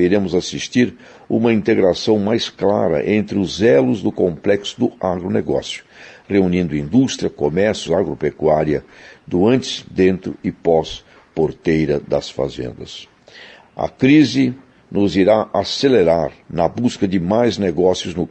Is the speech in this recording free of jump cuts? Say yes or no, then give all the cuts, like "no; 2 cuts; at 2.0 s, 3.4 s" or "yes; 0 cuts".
no; 3 cuts; at 7.9 s, 13.6 s, 16.4 s